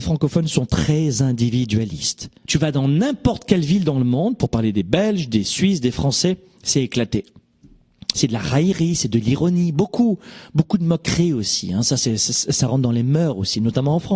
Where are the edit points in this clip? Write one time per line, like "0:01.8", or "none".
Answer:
0:02.4
0:08.1